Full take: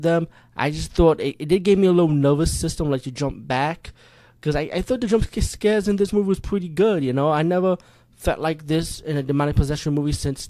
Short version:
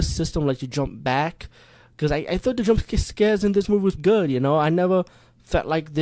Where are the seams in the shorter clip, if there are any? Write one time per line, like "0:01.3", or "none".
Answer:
0:04.0